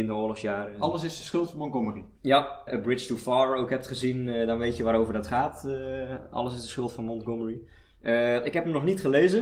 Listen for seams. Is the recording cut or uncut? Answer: cut